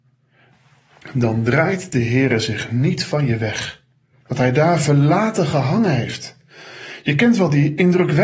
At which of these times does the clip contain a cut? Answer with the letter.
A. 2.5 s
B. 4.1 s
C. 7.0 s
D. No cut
B